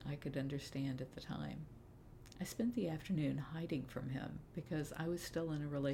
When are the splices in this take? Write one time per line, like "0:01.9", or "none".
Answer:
0:02.3